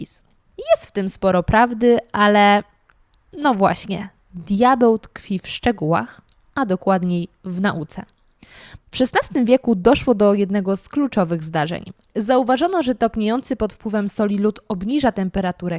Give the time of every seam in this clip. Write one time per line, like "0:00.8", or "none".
0:08.8
0:12.0